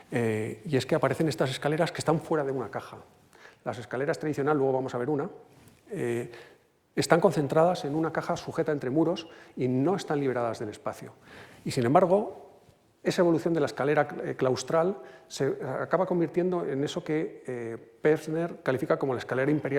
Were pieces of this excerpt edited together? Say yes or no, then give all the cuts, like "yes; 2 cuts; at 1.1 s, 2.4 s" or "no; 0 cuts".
no; 0 cuts